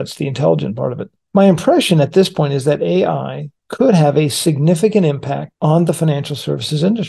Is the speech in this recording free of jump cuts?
yes; 0 cuts

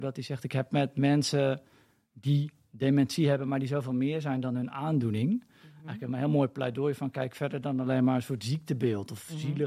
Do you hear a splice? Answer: no; 0 cuts

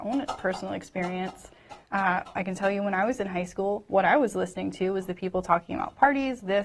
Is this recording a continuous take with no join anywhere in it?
yes; 0 cuts

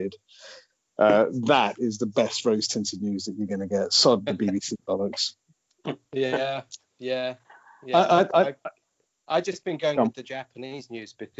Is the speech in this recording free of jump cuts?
yes; 0 cuts

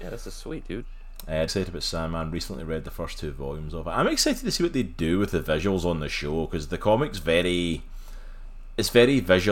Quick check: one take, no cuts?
no; 1 cut; at 1.5 s

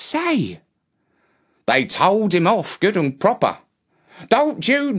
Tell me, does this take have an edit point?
no; 0 cuts

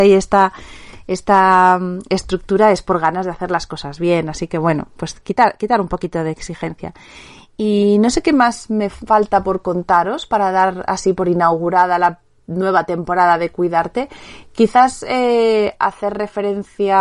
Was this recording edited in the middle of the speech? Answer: no; 0 cuts

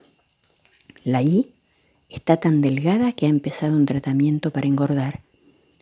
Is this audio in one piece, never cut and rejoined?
yes; 0 cuts

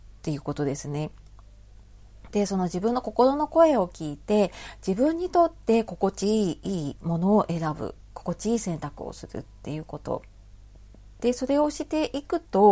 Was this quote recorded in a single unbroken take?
no; 1 cut; at 11.2 s

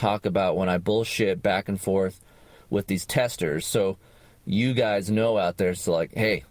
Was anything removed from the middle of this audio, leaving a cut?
no; 0 cuts

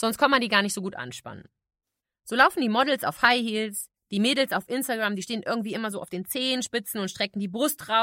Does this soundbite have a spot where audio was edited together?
no; 0 cuts

